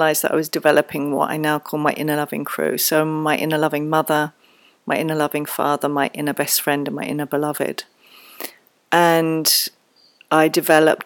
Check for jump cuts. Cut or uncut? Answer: uncut